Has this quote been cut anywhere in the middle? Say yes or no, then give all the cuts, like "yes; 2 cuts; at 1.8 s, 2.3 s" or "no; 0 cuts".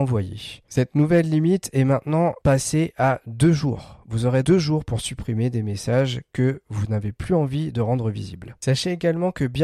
yes; 1 cut; at 4.4 s